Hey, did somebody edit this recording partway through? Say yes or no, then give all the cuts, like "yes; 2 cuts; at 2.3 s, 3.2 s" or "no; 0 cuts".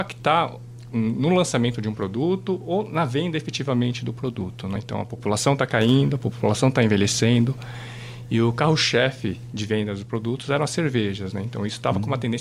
yes; 1 cut; at 4.8 s